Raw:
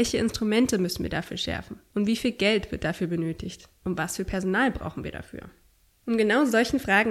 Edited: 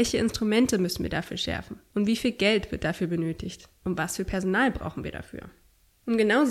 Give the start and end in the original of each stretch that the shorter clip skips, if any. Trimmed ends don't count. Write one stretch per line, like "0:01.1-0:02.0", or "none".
none